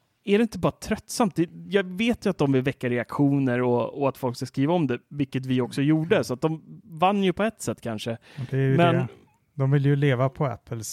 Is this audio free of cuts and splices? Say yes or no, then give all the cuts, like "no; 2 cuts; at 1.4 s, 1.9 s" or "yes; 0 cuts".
yes; 0 cuts